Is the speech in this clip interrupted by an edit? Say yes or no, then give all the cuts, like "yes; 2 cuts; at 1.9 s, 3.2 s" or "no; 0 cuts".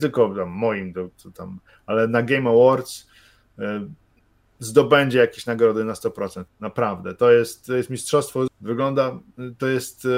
yes; 2 cuts; at 6.5 s, 8.5 s